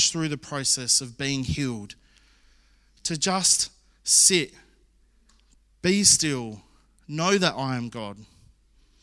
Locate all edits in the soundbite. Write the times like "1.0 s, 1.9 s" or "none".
none